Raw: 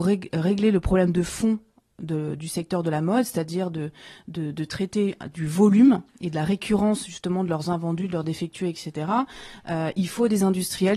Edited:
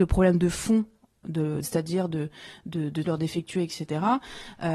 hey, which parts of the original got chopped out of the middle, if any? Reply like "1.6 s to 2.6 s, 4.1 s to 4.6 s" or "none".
2.4 s to 3.2 s, 4.7 s to 8.1 s